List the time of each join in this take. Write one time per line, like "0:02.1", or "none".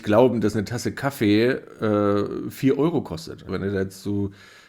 0:03.5